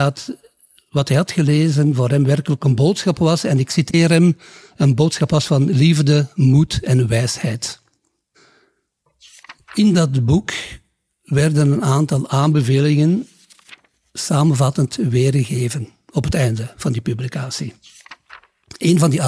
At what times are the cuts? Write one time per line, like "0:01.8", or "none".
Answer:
none